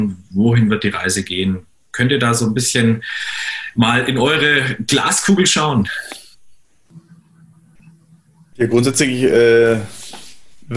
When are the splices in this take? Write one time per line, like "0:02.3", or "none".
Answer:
none